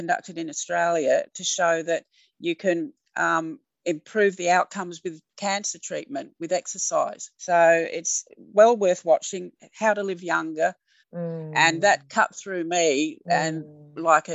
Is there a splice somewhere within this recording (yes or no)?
yes